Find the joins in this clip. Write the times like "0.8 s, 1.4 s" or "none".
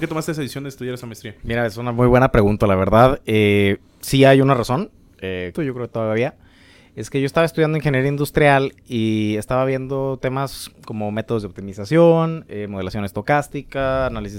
5.5 s